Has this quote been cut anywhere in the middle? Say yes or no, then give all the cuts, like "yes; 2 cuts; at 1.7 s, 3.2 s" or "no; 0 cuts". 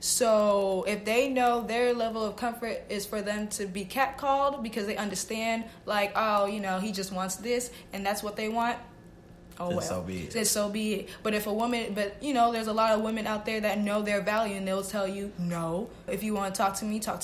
yes; 1 cut; at 16.1 s